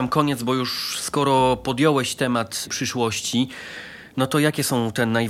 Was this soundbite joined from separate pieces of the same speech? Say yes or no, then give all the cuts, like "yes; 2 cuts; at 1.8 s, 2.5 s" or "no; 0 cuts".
no; 0 cuts